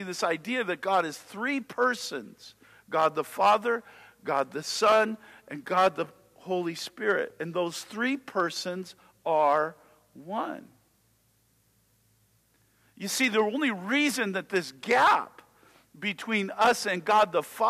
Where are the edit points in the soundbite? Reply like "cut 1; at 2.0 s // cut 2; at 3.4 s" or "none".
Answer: none